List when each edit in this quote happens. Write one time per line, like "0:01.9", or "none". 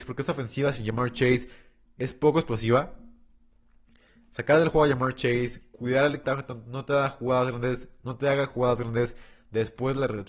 0:06.2